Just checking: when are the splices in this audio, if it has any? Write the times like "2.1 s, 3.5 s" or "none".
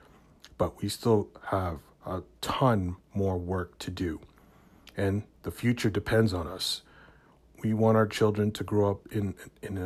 none